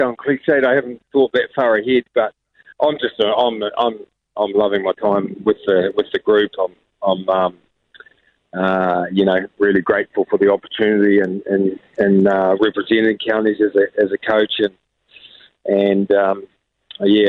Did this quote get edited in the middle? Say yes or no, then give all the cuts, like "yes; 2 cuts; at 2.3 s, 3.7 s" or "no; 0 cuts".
no; 0 cuts